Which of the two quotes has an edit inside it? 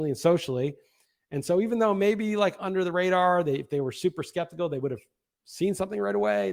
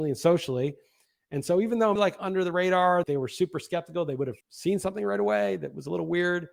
second; 3 cuts; at 2.0 s, 3.0 s, 4.4 s

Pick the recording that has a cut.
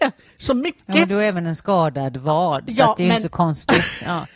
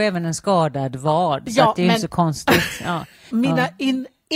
second; 1 cut; at 3.3 s

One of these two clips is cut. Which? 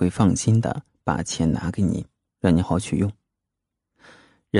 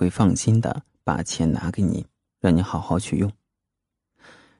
first; 1 cut; at 2.6 s

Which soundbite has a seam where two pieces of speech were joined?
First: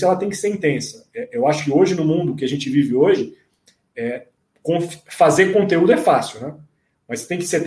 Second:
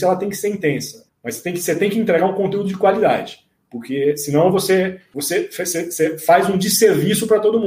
second; 1 cut; at 1.1 s

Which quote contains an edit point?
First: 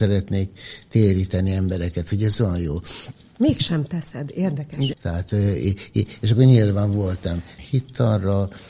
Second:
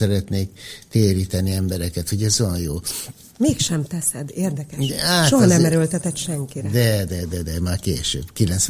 first; 2 cuts; at 4.9 s, 7.6 s

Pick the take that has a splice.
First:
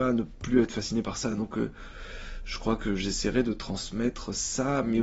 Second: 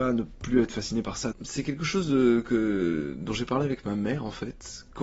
second; 1 cut; at 1.3 s

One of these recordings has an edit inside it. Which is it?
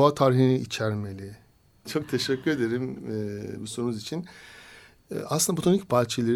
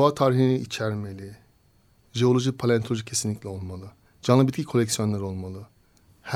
first; 1 cut; at 1.8 s

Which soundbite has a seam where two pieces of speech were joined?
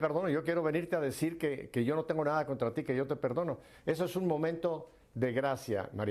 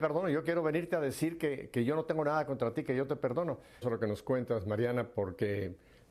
second; 1 cut; at 3.8 s

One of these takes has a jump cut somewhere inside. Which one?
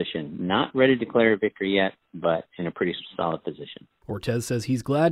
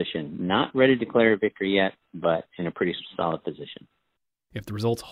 first; 1 cut; at 4.0 s

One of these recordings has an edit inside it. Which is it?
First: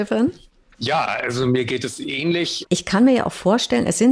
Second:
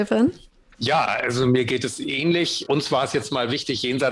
first; 1 cut; at 2.6 s

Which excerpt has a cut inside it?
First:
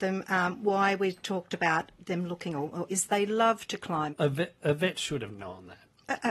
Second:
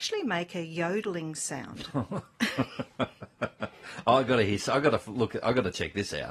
first; 2 cuts; at 2.9 s, 4.1 s

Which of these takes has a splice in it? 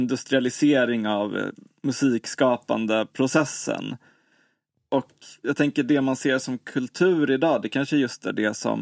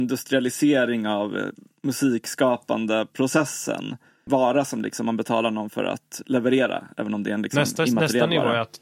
second; 1 cut; at 4.3 s

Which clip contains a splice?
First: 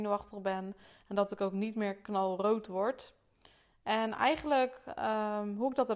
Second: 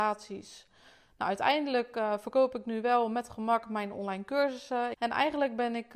second; 1 cut; at 4.9 s

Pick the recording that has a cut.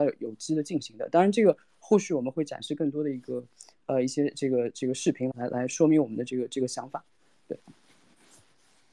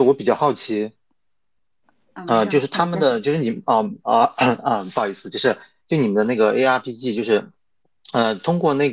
first; 1 cut; at 5.3 s

